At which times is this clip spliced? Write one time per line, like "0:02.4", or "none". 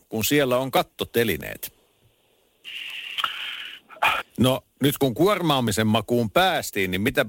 0:04.2